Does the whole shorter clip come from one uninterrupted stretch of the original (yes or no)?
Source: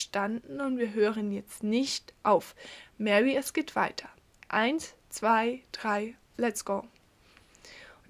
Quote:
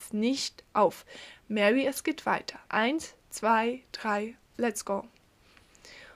no